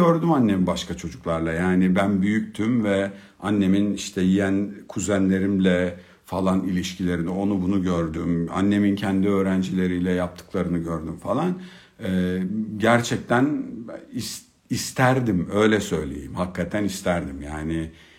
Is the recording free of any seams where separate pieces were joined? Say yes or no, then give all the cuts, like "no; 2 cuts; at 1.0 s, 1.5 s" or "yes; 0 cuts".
yes; 0 cuts